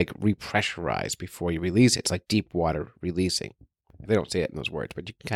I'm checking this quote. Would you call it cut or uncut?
cut